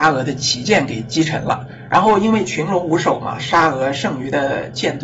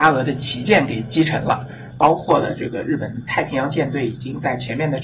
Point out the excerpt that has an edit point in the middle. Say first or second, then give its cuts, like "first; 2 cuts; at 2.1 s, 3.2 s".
second; 1 cut; at 1.9 s